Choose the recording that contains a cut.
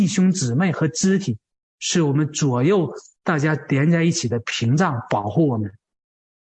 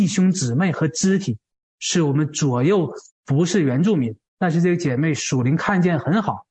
second; 2 cuts; at 3.1 s, 4.3 s

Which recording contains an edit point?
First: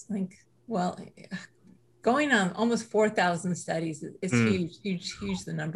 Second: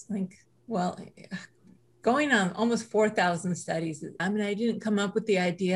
second; 1 cut; at 4.2 s

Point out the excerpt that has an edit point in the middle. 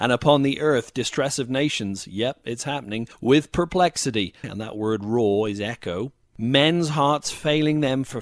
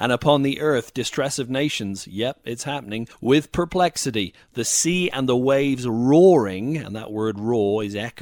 first; 1 cut; at 4.4 s

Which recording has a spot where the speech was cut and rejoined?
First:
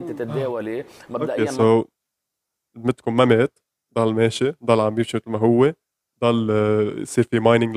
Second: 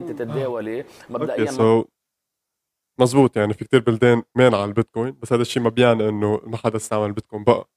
first; 1 cut; at 2.7 s

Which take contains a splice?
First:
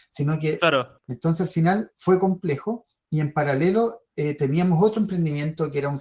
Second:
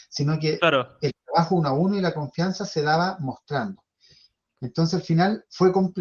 first; 2 cuts; at 1.0 s, 4.1 s

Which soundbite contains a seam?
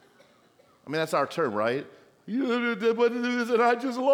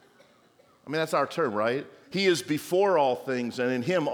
second; 1 cut; at 2.0 s

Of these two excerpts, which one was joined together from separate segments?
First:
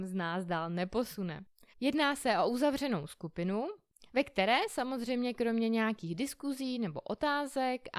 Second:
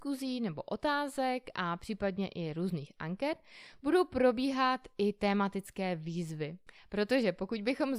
first; 1 cut; at 1.7 s

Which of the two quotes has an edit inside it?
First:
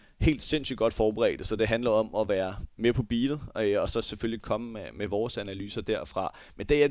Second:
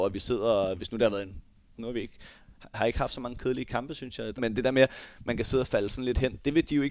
second; 2 cuts; at 1.7 s, 4.4 s

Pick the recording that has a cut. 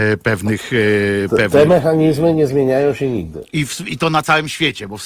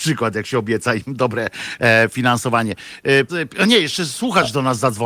second; 1 cut; at 3.3 s

